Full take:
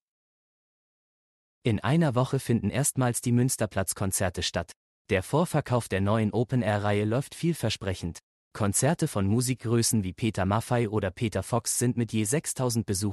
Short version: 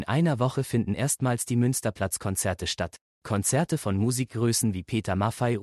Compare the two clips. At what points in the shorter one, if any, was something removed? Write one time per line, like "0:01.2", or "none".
0:03.1